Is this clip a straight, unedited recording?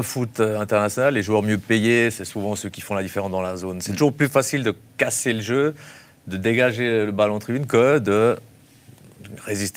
yes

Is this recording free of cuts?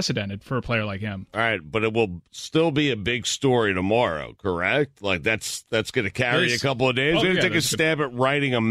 no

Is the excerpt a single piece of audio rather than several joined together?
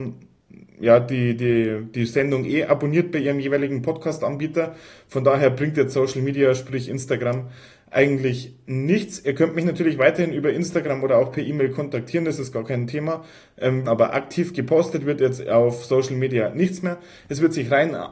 no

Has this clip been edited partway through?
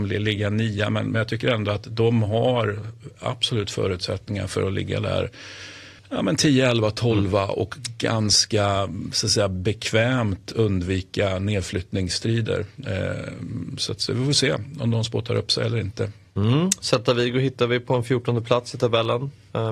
yes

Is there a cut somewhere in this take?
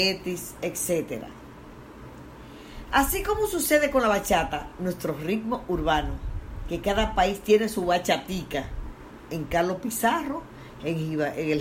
no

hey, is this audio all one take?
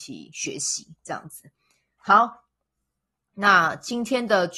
yes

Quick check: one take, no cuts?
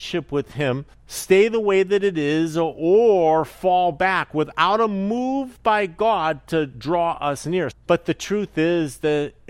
no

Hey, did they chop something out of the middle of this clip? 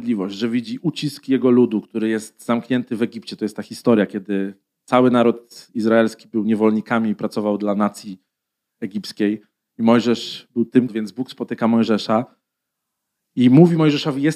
yes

